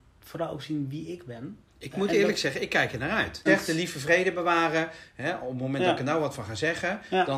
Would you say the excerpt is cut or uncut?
cut